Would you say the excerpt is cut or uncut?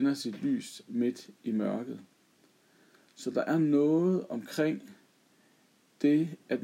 uncut